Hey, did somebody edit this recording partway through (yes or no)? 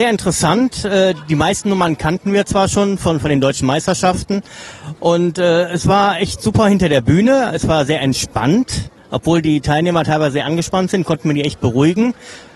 no